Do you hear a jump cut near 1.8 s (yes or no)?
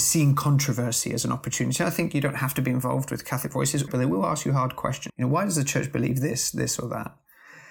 no